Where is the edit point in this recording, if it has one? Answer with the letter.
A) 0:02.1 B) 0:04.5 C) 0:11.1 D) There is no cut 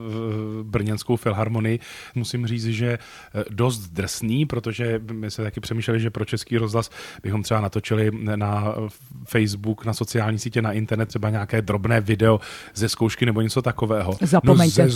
A